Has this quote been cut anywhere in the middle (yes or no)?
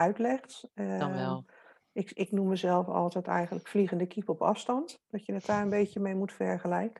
no